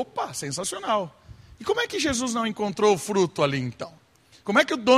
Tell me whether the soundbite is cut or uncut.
uncut